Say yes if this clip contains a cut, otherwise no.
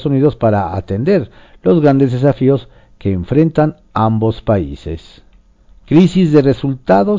yes